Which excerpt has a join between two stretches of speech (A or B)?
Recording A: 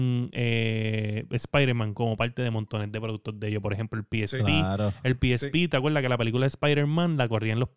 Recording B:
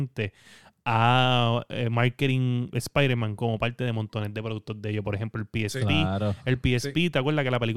B